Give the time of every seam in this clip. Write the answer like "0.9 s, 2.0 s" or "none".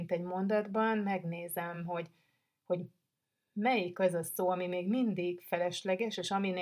none